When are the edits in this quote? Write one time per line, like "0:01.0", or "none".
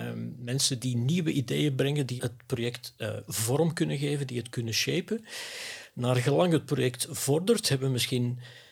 0:02.2